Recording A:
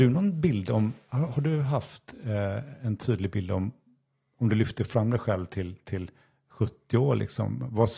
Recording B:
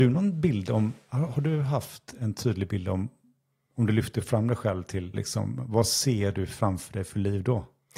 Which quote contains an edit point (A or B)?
B